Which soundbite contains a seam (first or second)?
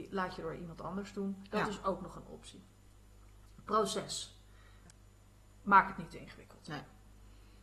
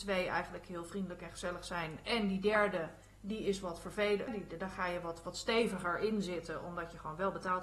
second